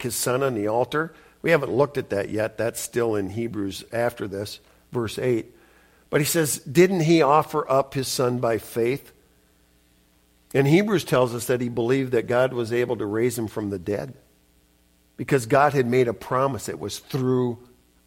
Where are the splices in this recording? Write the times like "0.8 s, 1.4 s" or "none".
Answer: none

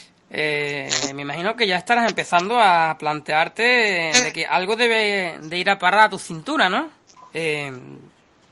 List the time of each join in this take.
7.2 s

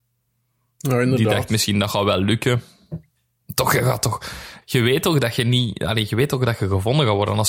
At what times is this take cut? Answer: 4.6 s

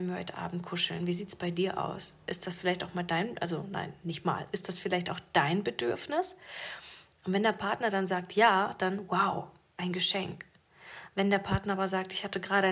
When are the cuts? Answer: none

